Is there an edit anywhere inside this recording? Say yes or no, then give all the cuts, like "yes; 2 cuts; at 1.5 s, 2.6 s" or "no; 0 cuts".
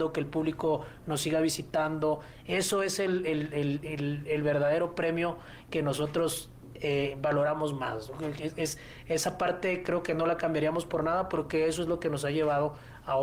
no; 0 cuts